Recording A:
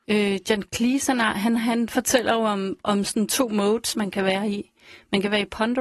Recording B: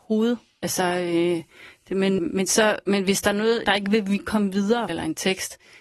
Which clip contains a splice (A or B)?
B